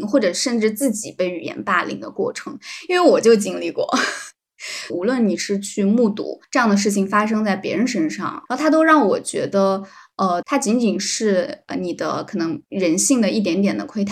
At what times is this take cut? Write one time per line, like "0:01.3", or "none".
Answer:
0:04.9
0:08.5
0:10.4